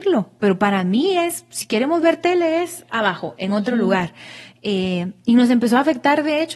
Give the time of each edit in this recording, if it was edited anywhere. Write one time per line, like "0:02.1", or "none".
none